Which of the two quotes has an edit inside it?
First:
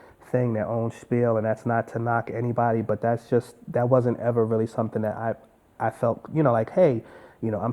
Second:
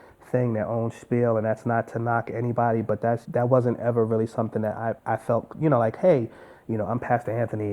second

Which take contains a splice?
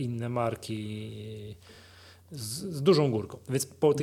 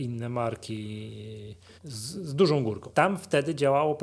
second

